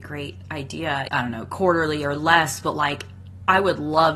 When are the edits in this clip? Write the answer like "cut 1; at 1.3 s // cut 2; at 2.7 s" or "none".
cut 1; at 1.1 s